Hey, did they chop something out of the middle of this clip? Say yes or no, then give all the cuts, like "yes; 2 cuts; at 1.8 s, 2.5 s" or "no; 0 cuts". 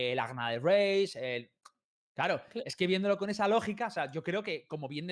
no; 0 cuts